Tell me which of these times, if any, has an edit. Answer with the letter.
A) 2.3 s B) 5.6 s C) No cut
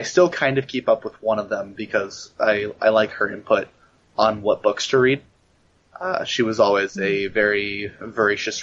C